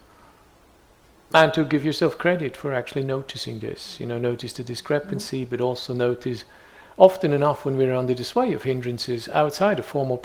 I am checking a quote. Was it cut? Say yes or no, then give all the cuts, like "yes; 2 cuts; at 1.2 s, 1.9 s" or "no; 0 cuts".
no; 0 cuts